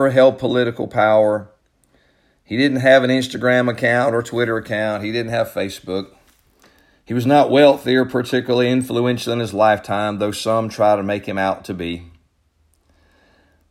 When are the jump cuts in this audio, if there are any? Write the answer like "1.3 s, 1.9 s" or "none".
none